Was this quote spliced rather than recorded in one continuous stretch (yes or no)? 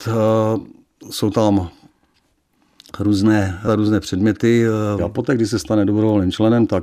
yes